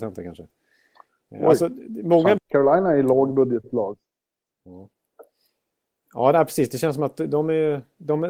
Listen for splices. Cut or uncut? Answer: cut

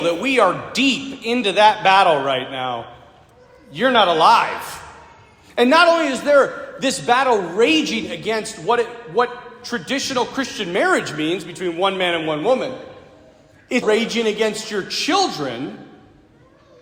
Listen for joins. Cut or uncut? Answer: cut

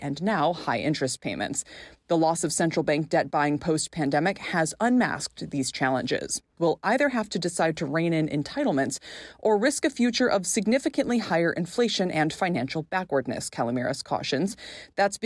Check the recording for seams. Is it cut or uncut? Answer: cut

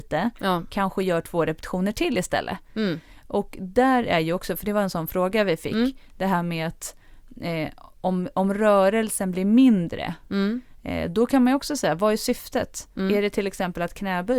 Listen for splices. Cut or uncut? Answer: uncut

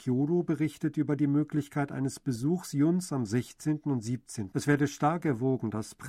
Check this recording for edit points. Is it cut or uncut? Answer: cut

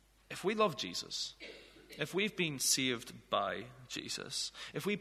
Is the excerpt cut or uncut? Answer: uncut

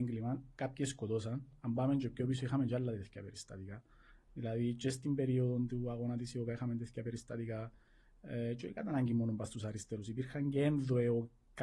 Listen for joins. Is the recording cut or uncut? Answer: uncut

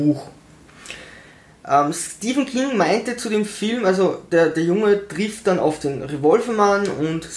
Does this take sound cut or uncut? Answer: cut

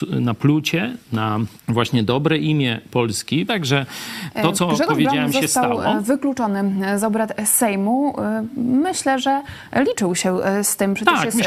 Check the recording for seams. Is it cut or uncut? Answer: cut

